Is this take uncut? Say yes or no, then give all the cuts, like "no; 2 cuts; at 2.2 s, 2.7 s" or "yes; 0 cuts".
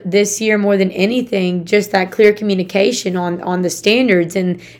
yes; 0 cuts